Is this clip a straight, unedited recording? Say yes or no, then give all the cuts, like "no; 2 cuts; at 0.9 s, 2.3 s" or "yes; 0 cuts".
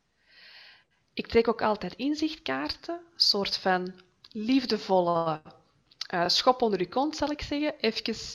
yes; 0 cuts